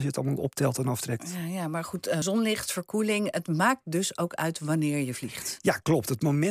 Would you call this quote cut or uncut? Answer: uncut